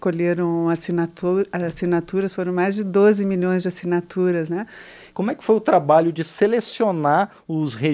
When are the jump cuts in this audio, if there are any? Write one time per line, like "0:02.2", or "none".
0:05.1